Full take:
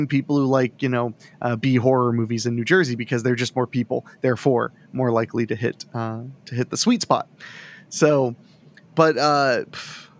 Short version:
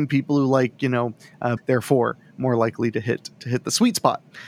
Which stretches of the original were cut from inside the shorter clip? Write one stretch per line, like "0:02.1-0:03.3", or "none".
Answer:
0:01.6-0:04.1
0:05.9-0:06.4